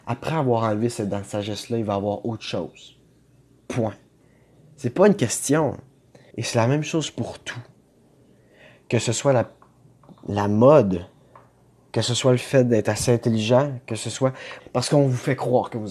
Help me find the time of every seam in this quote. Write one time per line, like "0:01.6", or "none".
0:06.3
0:14.6